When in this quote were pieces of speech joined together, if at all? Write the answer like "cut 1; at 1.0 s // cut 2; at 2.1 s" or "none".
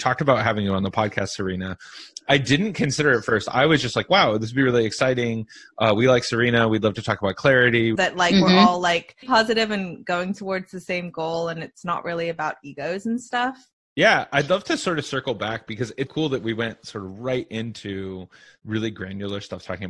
cut 1; at 8.0 s // cut 2; at 9.2 s // cut 3; at 16.1 s